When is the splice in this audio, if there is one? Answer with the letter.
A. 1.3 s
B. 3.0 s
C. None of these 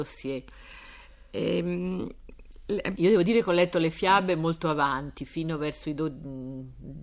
B